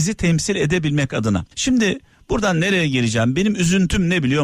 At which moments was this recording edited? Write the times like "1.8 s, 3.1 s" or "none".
1.5 s